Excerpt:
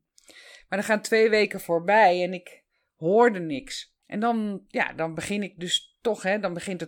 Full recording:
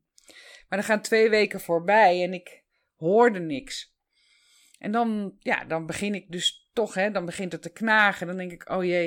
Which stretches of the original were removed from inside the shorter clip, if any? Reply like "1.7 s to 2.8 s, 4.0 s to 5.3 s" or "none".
4.0 s to 4.7 s

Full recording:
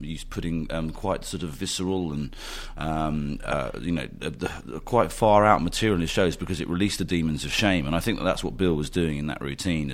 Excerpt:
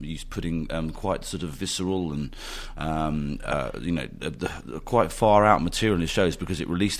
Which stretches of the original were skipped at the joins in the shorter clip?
none

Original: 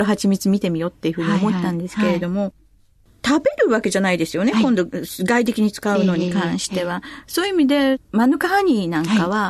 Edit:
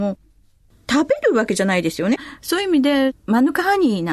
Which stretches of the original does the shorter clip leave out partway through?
4.5 s to 7.0 s

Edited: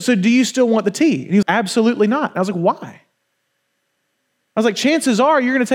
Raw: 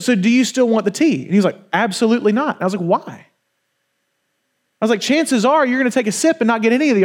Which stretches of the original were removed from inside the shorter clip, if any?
1.4 s to 1.7 s

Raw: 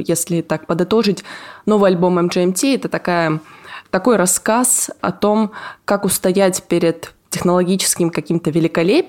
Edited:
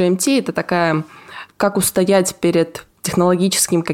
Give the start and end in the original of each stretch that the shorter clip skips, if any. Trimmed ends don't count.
3.9 s to 5.8 s

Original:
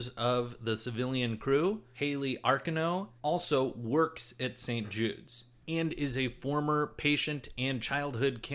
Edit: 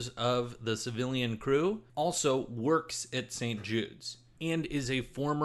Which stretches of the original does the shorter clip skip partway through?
1.9 s to 3.2 s

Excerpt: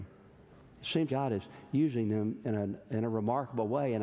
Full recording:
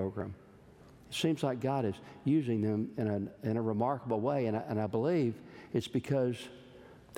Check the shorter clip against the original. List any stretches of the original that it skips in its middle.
1.4 s to 1.6 s

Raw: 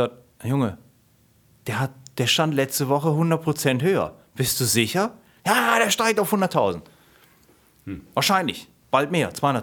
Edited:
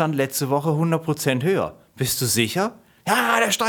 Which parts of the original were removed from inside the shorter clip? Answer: none

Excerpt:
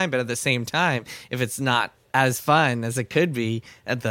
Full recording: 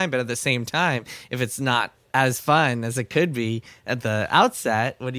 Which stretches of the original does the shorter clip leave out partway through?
none

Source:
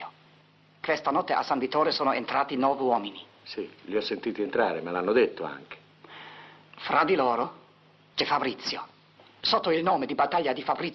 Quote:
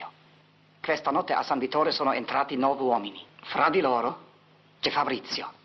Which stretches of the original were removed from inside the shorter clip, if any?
3.3 s to 6.6 s

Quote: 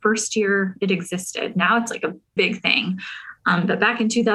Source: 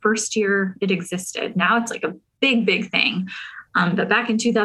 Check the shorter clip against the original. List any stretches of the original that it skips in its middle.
2.4 s to 2.7 s

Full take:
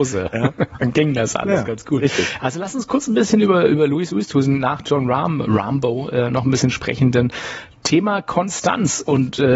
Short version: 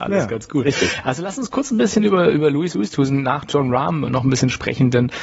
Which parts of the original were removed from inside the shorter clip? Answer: 5.4 s to 6.3 s

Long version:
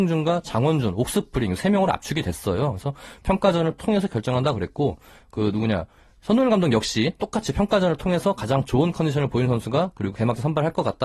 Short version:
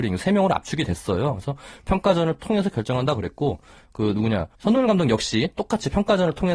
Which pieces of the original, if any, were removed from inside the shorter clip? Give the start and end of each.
5.9 s to 6.2 s

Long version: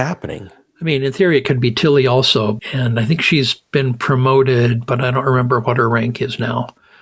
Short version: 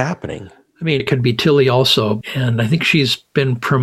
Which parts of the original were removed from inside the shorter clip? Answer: 1.0 s to 1.4 s

